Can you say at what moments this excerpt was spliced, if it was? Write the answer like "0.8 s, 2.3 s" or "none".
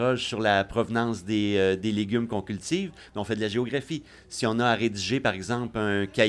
none